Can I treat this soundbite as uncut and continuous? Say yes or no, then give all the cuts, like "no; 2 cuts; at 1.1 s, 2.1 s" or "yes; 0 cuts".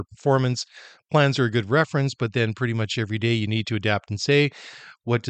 yes; 0 cuts